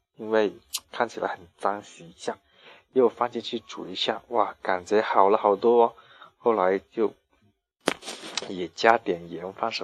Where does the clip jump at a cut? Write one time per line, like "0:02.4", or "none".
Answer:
none